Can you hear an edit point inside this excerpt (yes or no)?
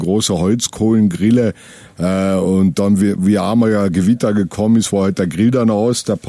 no